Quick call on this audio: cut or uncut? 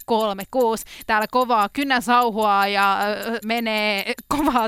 cut